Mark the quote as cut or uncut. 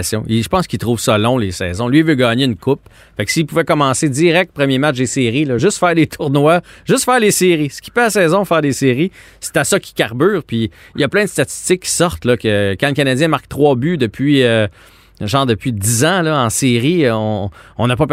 uncut